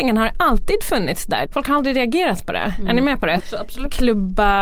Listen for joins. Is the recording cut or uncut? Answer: cut